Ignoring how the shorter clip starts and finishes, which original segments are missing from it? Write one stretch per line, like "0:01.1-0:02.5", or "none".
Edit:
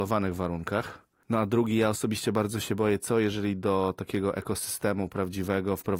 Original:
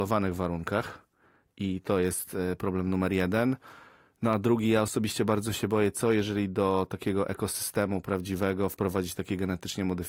0:01.2-0:04.2